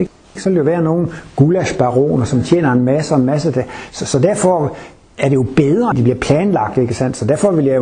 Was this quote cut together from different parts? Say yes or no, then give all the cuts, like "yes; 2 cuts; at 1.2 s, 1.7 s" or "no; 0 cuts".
yes; 1 cut; at 5.9 s